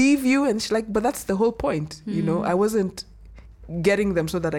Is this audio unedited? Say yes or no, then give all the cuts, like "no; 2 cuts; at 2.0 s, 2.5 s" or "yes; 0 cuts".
yes; 0 cuts